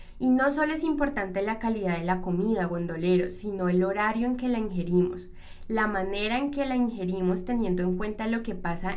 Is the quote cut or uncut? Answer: uncut